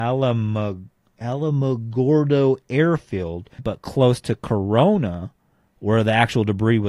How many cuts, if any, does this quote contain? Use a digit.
1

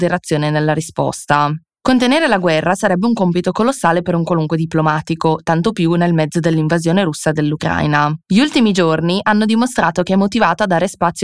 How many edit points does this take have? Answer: 1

